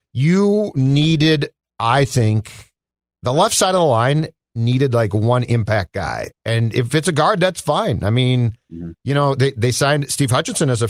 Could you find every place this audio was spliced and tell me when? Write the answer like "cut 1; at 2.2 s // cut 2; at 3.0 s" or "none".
none

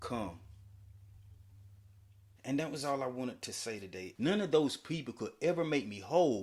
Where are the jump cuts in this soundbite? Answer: cut 1; at 2.4 s // cut 2; at 4.1 s

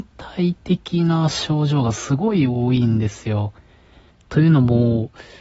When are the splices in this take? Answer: cut 1; at 4.1 s

